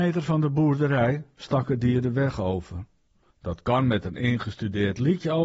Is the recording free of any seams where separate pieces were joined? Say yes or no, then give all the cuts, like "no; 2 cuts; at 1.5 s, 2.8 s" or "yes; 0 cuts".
no; 1 cut; at 3.3 s